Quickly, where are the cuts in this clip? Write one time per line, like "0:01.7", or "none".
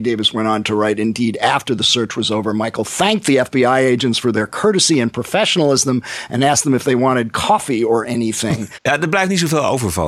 0:08.7